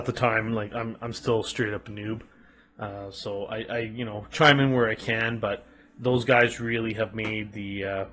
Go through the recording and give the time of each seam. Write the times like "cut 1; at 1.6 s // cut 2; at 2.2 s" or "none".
none

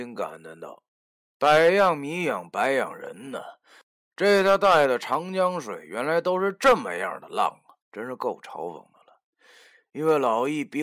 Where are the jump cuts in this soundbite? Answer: cut 1; at 7.8 s

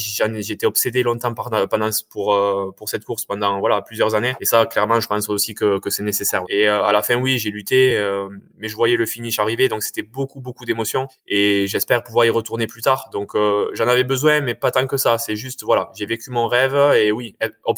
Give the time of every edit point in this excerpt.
cut 1; at 6.4 s

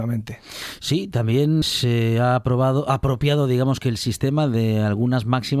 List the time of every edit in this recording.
cut 1; at 1.6 s

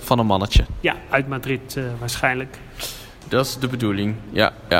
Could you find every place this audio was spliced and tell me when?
none

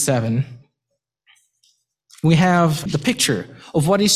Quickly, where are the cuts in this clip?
cut 1; at 2.9 s

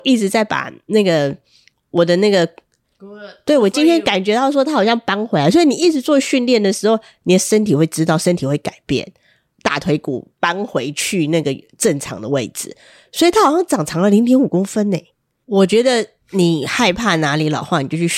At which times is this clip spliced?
cut 1; at 2.8 s // cut 2; at 9.5 s // cut 3; at 15.4 s

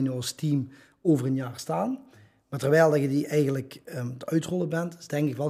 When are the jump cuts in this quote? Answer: none

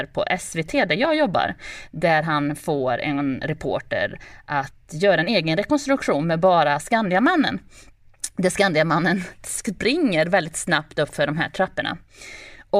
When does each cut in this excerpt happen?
none

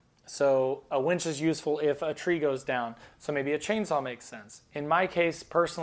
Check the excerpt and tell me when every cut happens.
cut 1; at 3.1 s

